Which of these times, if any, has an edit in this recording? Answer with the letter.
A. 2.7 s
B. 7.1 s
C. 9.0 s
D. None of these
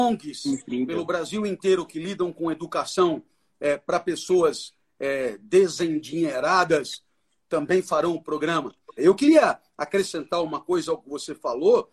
C